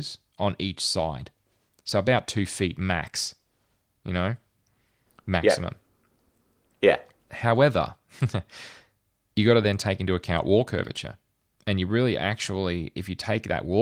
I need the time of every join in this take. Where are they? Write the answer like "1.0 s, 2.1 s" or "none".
none

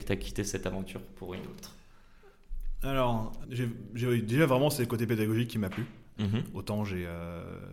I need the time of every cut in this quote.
3.4 s, 6.2 s

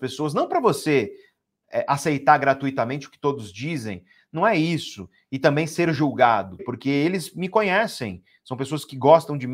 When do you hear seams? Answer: 6.6 s

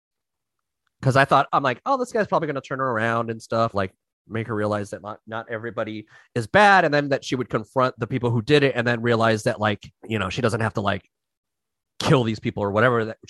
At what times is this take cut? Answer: 3.7 s, 8.0 s, 10.0 s

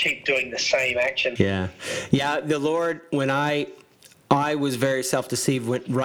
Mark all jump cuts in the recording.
1.4 s

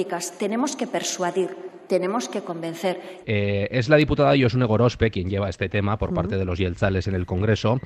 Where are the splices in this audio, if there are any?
3.2 s

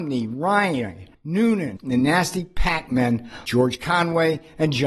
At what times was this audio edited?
1.8 s, 3.4 s

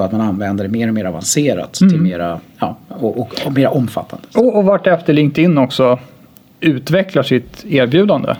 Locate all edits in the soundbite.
none

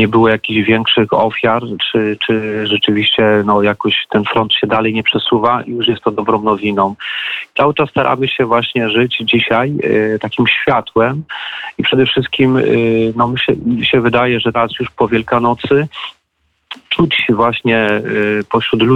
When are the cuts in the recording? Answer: 14.5 s

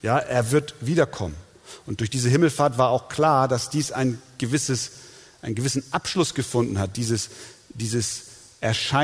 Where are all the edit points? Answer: none

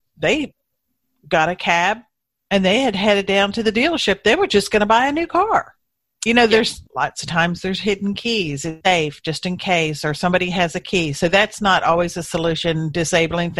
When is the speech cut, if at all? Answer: 6.9 s, 8.8 s

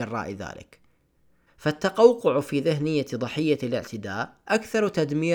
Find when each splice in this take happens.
1.5 s

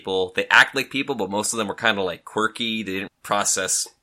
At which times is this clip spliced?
3.1 s

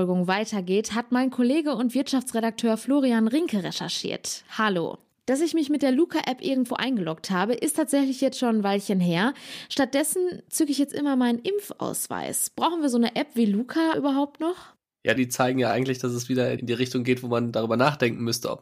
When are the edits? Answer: 5.1 s, 13.9 s, 15.2 s

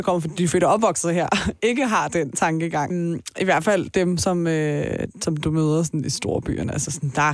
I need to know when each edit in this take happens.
2.9 s

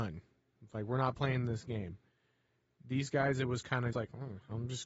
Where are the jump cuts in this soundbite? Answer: 3.9 s

